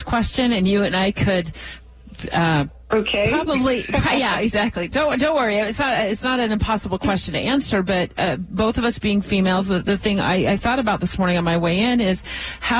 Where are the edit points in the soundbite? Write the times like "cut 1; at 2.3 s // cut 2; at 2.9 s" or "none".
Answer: none